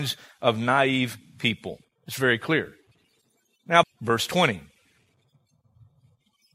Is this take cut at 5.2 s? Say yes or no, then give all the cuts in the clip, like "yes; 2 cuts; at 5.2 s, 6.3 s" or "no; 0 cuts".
no; 2 cuts; at 1.8 s, 3.8 s